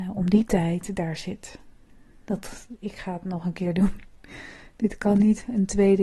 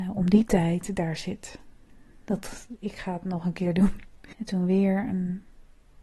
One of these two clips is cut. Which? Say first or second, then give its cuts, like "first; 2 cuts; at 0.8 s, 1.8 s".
second; 1 cut; at 4.3 s